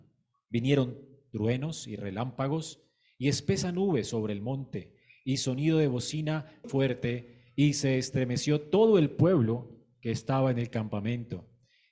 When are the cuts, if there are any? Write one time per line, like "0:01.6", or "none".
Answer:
0:06.6